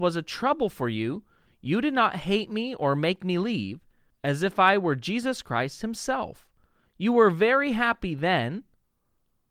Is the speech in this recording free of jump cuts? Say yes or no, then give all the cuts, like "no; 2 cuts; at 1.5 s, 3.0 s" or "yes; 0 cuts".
no; 1 cut; at 4.1 s